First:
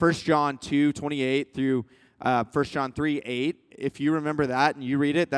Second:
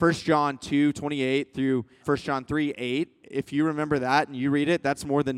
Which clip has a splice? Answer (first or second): second